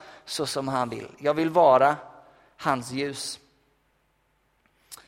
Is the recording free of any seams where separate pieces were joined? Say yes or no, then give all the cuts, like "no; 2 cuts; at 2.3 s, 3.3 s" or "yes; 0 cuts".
yes; 0 cuts